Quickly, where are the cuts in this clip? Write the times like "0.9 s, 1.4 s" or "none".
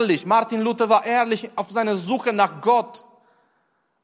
none